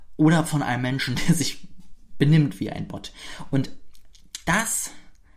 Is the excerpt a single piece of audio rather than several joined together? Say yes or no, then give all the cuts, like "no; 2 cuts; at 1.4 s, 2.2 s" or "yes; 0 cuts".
yes; 0 cuts